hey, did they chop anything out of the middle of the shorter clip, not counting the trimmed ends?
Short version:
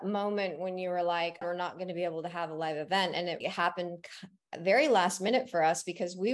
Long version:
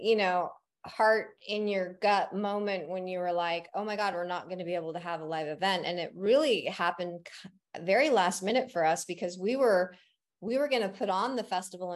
yes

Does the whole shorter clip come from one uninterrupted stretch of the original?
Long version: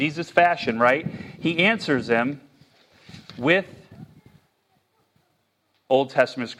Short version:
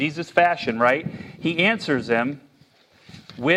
yes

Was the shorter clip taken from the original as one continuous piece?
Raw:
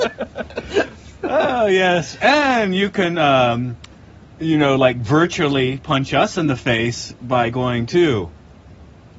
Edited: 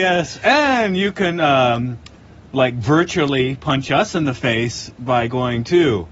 no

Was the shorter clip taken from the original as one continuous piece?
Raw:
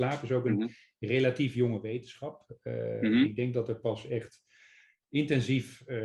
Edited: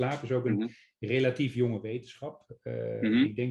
yes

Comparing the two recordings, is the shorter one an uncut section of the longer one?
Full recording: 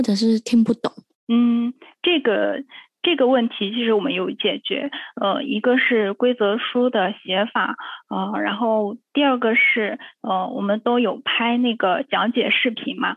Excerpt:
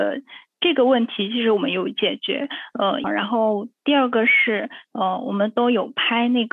no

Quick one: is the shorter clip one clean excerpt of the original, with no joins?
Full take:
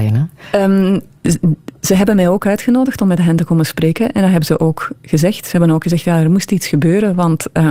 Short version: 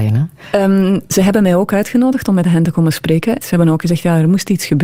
no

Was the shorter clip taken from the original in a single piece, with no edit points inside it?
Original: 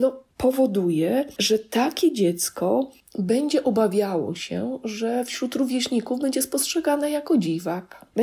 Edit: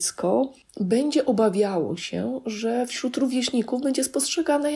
yes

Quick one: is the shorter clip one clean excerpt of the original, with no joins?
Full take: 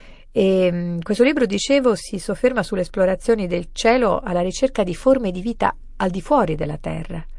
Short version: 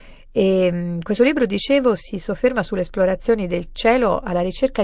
yes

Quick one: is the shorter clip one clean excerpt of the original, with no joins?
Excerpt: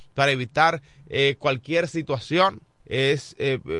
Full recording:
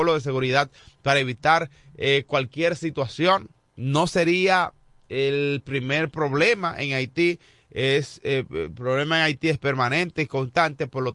no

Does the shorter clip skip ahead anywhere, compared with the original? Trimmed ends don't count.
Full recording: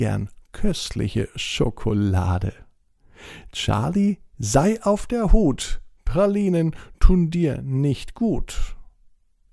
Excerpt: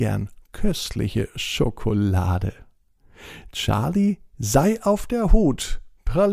no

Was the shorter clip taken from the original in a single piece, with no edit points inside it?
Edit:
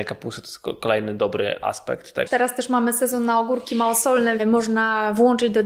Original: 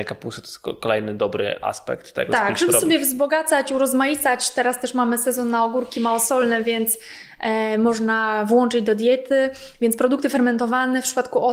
no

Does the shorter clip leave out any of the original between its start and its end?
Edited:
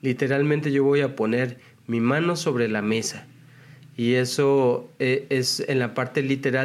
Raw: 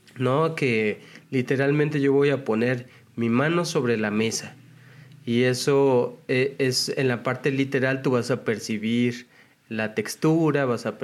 no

